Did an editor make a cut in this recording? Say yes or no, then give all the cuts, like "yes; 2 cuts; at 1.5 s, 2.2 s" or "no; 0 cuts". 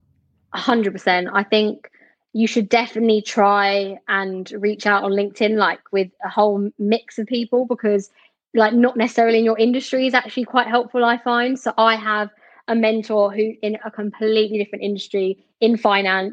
no; 0 cuts